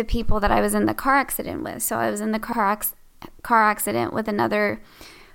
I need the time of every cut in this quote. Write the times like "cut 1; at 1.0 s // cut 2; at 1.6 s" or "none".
none